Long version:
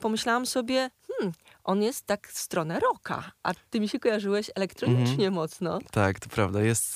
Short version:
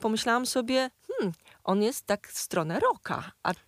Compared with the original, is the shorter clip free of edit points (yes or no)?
yes